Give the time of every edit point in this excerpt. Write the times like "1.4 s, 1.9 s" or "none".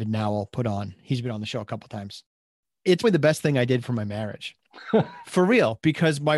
3.0 s

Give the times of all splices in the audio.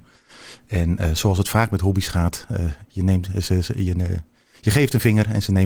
none

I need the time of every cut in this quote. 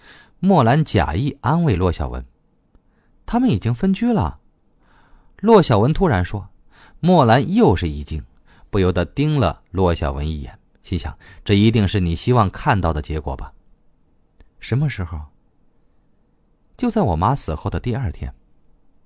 2.3 s

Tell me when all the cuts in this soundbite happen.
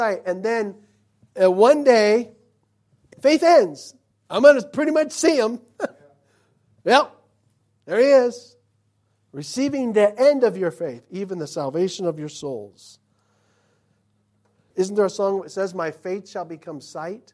3.1 s, 14.7 s

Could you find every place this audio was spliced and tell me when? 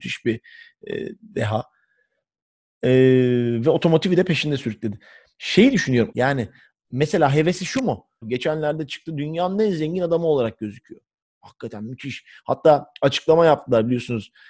6.1 s, 8.2 s

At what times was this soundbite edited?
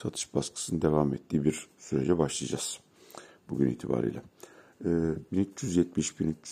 5.3 s

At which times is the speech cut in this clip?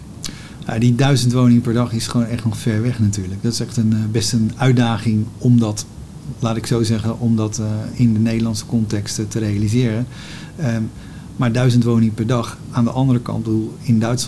none

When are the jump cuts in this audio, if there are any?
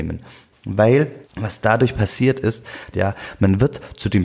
1.2 s, 2.9 s

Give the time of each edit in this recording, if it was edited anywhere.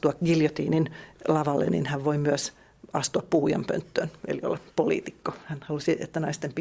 none

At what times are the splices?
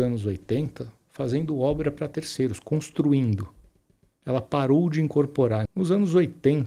5.7 s

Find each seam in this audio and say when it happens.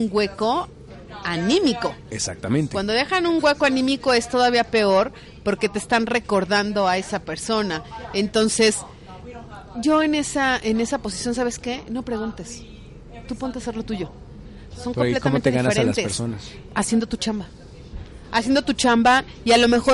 14.7 s

